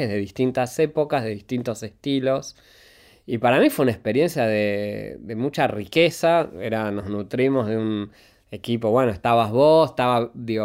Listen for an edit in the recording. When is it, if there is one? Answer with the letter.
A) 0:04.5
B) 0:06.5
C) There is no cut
C